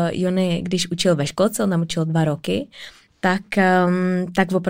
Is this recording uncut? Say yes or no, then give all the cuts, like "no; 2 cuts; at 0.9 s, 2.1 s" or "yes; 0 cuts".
yes; 0 cuts